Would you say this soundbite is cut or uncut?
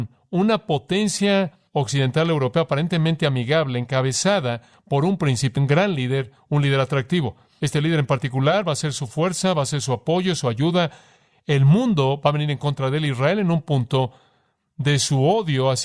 cut